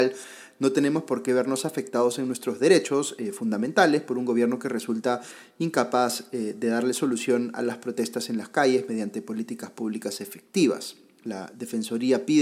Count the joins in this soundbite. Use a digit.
0